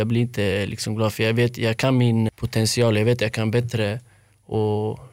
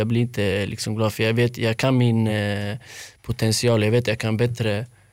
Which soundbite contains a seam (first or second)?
first